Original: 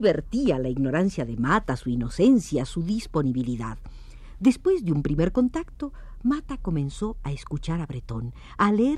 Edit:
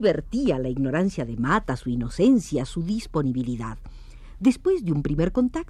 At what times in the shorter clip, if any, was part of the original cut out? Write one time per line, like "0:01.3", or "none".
none